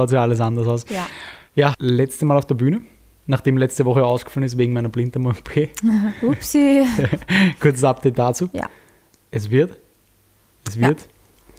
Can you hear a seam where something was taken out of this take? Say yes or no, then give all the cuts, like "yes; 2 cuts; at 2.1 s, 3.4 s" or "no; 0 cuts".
yes; 1 cut; at 1.7 s